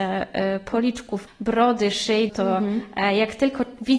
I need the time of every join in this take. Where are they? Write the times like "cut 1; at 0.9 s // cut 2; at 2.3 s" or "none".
cut 1; at 1.3 s // cut 2; at 2.3 s